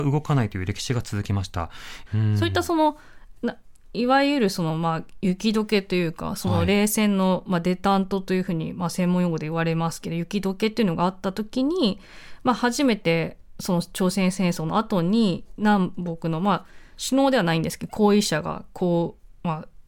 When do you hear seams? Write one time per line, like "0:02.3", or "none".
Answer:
0:02.1

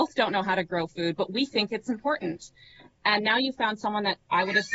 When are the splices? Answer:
none

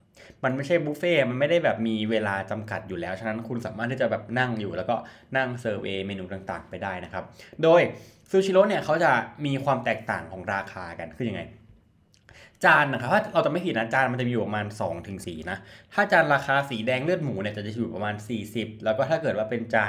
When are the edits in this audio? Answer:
0:15.2

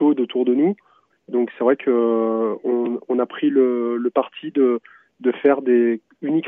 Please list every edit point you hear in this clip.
0:01.1

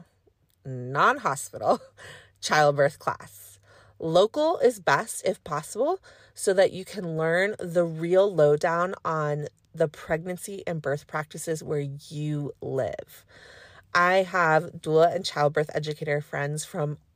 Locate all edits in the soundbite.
none

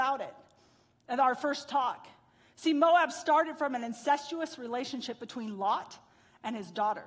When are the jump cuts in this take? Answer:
none

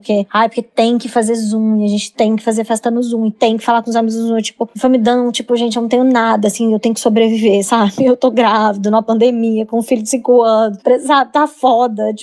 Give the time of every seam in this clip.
none

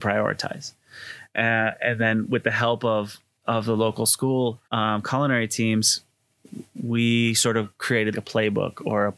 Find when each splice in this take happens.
0:04.6
0:08.1

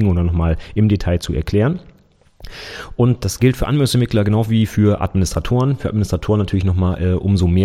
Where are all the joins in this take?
none

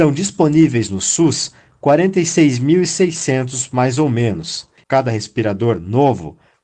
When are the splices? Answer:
0:04.8

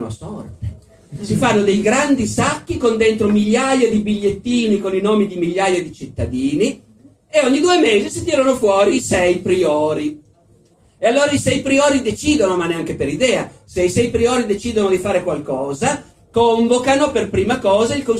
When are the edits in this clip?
none

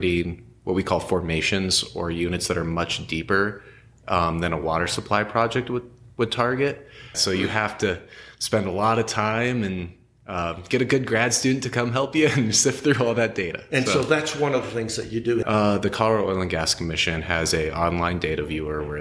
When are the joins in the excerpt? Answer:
0:07.1
0:15.4

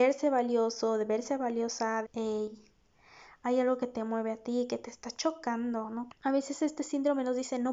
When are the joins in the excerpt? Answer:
0:02.0
0:06.1

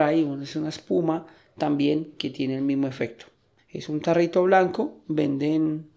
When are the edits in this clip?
0:03.6

